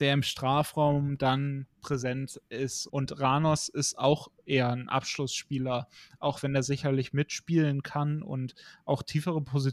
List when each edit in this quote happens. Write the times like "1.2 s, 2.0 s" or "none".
2.9 s